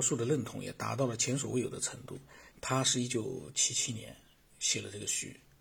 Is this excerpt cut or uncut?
cut